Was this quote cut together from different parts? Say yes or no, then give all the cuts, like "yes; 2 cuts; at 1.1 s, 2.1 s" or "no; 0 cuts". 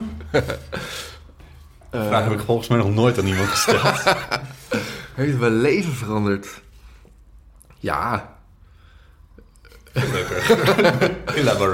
no; 0 cuts